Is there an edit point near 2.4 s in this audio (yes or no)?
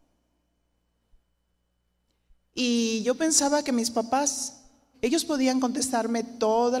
no